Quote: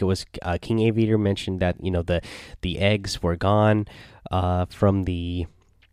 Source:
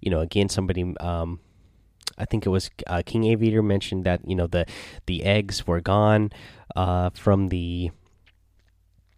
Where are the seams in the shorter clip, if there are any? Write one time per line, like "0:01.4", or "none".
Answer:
none